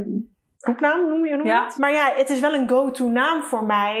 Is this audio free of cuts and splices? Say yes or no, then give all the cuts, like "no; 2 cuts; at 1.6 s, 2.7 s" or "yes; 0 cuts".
yes; 0 cuts